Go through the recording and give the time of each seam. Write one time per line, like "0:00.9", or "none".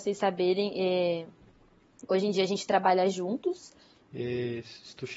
0:04.1